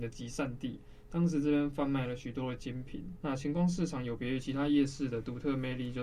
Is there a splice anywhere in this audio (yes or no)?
yes